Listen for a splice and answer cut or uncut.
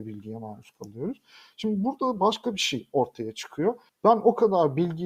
uncut